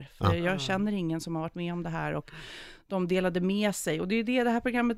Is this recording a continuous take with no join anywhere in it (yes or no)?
yes